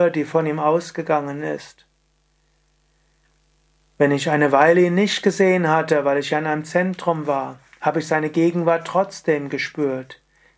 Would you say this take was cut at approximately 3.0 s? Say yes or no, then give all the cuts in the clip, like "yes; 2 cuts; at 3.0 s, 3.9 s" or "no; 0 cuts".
no; 0 cuts